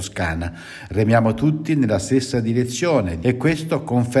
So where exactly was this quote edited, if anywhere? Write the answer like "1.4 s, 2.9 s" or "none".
3.2 s